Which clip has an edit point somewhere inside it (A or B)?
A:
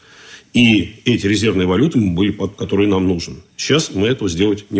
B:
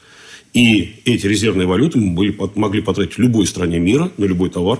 A